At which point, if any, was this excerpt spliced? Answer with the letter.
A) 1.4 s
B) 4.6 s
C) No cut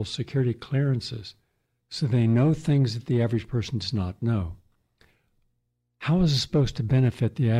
C